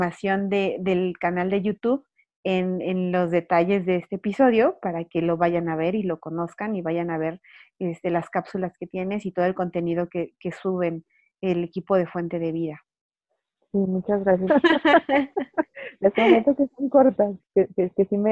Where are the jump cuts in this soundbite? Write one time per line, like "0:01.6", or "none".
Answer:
0:14.5
0:17.4